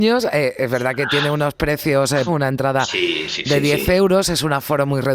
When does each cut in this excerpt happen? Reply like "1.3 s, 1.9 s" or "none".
2.3 s